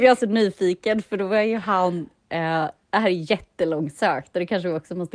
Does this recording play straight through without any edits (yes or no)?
yes